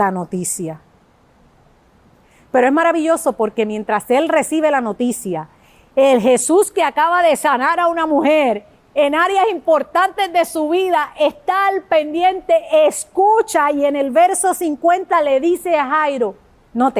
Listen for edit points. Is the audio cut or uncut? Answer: uncut